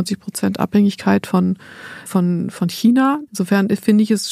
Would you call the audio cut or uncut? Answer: cut